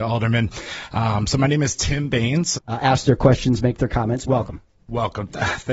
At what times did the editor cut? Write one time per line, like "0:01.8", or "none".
0:02.5
0:04.3